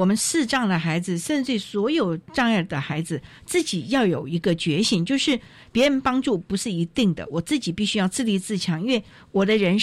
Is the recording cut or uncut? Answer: uncut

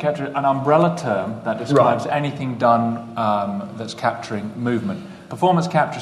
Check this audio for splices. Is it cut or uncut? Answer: uncut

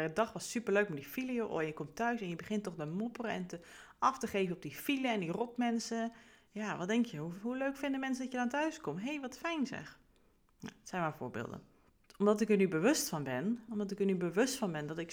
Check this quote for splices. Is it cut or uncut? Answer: cut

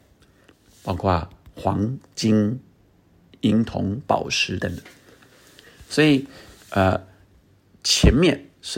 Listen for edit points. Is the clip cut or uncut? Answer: cut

